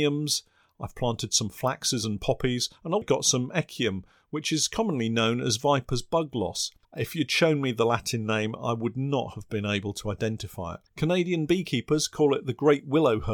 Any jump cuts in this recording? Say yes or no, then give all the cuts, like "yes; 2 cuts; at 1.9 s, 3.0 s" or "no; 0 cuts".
yes; 3 cuts; at 3.0 s, 6.8 s, 10.9 s